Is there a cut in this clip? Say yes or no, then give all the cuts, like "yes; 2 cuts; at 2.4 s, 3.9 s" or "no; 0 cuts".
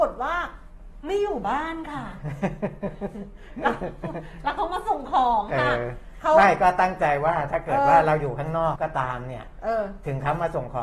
yes; 1 cut; at 8.8 s